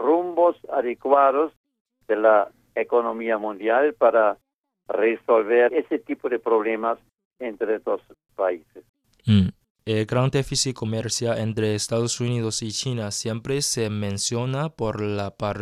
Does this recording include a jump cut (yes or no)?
yes